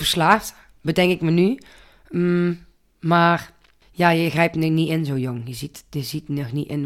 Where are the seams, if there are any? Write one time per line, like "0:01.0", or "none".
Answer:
none